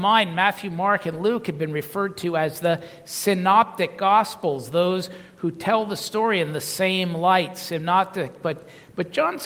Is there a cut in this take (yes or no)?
no